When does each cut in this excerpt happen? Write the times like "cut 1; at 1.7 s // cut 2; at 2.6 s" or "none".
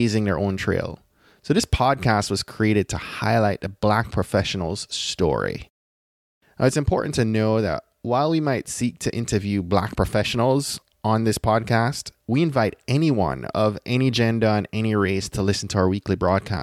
cut 1; at 6.4 s